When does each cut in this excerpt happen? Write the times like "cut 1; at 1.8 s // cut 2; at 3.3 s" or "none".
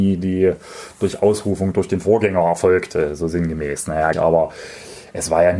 cut 1; at 4.1 s